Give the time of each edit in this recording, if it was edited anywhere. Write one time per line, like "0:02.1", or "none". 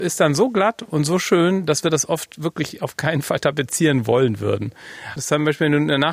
0:05.2